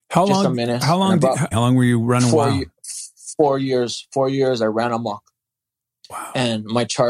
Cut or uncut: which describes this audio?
cut